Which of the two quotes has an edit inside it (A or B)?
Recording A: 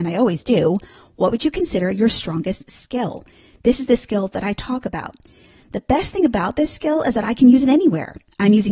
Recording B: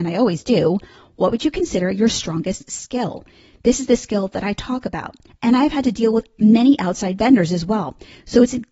B